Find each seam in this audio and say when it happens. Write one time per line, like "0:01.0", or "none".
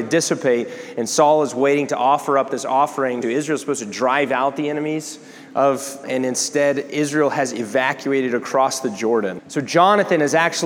0:03.2
0:06.0
0:09.4